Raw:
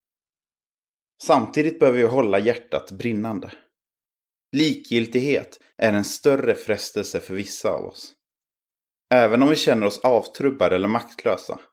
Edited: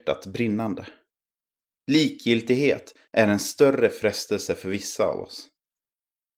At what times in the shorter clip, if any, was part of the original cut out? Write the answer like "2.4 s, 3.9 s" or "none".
none